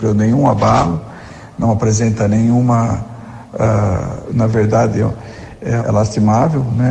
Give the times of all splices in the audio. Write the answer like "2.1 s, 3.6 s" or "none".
4.3 s, 5.8 s

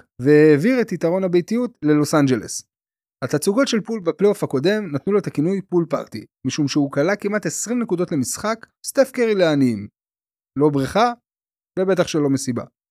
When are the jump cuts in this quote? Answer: 3.0 s, 8.8 s, 10.4 s

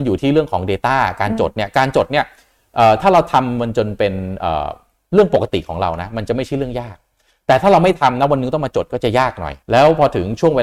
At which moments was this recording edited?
9.6 s

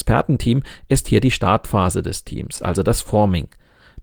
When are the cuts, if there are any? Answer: none

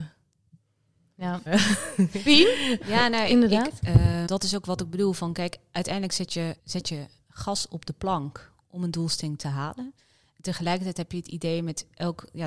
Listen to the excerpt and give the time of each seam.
1.5 s, 4.3 s, 6.6 s

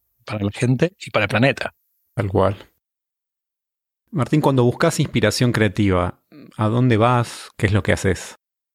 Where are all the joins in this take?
7.5 s

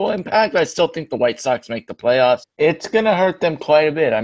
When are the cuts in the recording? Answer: 2.4 s

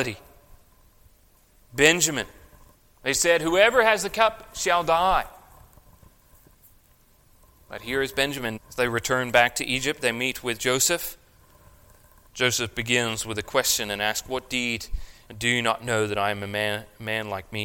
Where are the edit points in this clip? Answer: 8.6 s, 12.3 s, 15.3 s

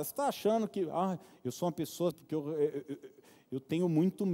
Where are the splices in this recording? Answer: 2.1 s

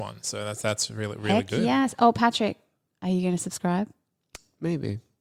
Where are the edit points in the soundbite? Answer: none

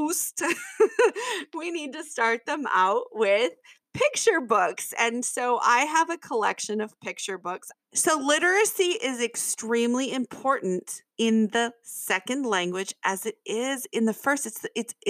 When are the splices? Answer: 7.7 s, 11.1 s

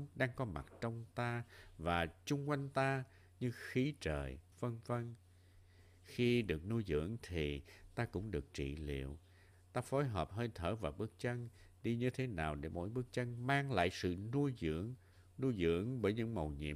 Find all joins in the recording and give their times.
4.5 s, 9.5 s

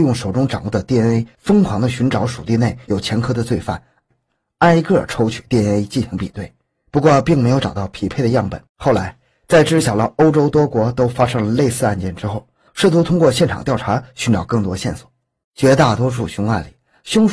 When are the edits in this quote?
8.7 s, 12.7 s, 15.4 s

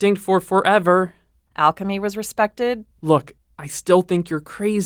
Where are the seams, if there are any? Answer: 1.5 s, 2.9 s

